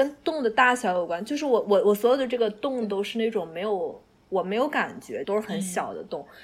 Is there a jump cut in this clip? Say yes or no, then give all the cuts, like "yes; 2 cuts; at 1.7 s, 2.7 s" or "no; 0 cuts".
yes; 1 cut; at 5.2 s